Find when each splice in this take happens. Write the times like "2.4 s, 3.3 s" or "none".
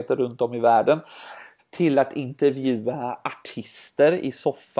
1.6 s